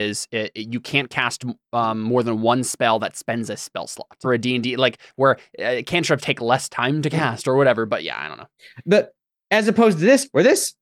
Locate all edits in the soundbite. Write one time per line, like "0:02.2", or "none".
0:04.2
0:06.2